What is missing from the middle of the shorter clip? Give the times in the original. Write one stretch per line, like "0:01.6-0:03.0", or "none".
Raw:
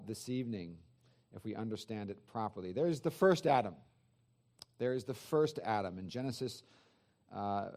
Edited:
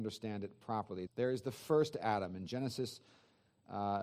0:02.7-0:04.7